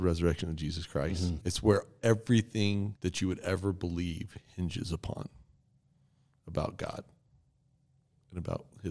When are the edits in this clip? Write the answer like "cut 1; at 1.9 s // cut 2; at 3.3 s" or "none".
cut 1; at 1.4 s // cut 2; at 3.0 s